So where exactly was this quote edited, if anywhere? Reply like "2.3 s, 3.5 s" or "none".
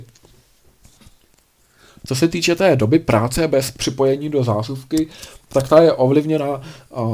none